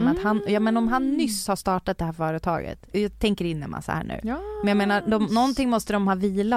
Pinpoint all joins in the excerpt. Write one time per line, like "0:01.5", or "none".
0:02.9